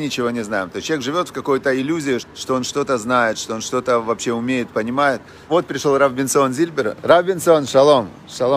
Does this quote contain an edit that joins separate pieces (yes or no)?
yes